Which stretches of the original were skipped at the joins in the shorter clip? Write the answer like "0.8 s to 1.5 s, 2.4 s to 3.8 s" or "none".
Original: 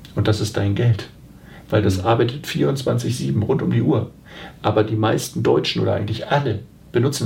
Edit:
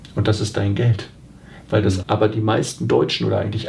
2.0 s to 4.6 s